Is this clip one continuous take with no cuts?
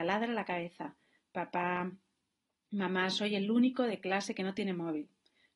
yes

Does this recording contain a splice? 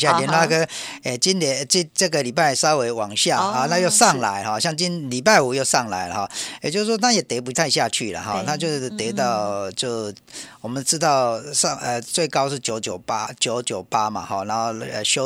no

